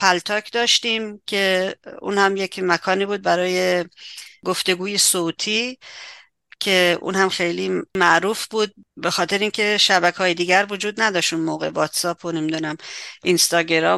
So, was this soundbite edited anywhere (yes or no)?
yes